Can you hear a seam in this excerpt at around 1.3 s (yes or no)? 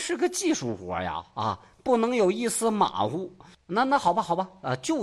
no